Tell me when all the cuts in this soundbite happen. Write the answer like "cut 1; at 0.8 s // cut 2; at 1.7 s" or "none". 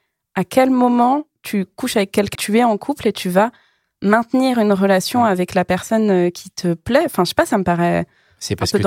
cut 1; at 2.4 s